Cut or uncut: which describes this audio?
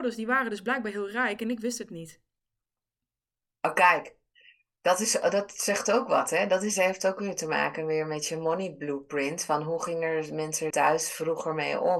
cut